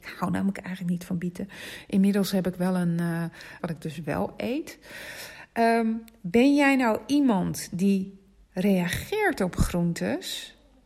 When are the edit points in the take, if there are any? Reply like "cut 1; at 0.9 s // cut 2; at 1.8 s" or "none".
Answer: cut 1; at 3.6 s